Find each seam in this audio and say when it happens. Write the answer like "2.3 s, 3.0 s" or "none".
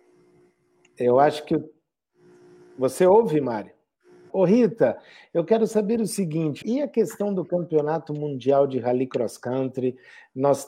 4.3 s, 6.6 s